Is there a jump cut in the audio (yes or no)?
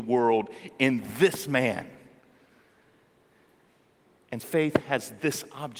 yes